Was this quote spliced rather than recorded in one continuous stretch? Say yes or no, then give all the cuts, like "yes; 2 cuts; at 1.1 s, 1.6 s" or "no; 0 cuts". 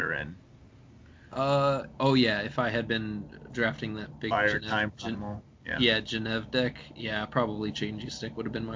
no; 0 cuts